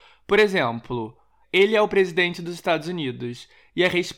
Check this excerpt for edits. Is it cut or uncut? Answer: cut